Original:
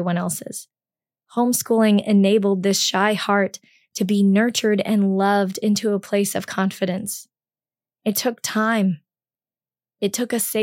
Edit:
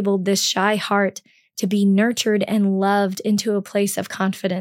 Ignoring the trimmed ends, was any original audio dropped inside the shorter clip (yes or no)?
no